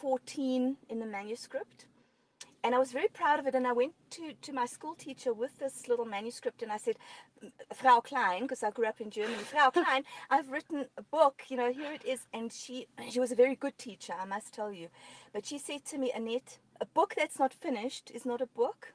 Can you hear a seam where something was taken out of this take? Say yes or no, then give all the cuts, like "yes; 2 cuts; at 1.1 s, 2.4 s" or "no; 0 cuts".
no; 0 cuts